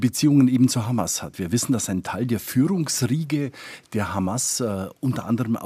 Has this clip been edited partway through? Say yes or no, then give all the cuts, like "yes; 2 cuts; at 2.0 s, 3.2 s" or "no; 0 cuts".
no; 0 cuts